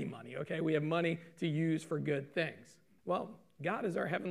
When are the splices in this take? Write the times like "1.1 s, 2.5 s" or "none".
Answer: 3.0 s